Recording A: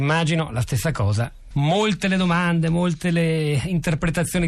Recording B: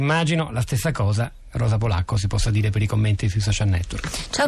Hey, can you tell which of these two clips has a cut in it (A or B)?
A